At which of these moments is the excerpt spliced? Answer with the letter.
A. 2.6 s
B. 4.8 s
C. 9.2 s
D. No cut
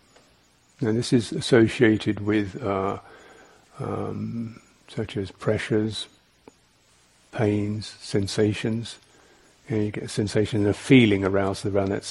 B